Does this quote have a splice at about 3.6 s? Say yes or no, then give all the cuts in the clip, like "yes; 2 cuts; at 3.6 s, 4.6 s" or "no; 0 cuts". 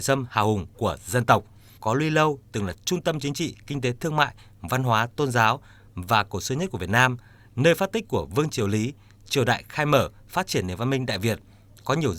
no; 1 cut; at 1.8 s